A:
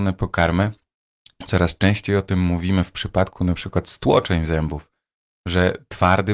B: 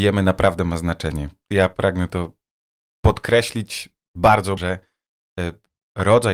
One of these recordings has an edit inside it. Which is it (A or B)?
B